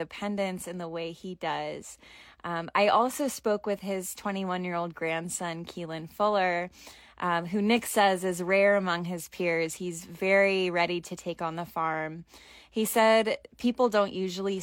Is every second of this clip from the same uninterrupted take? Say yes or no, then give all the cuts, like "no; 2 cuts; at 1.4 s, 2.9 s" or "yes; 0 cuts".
yes; 0 cuts